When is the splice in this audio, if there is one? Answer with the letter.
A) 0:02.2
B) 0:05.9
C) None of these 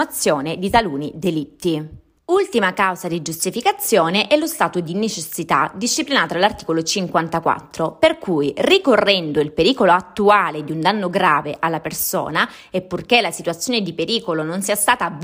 C